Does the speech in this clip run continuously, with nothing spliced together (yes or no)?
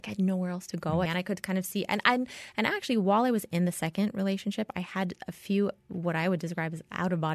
no